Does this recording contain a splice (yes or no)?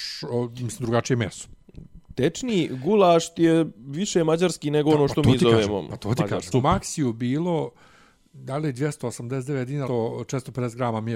yes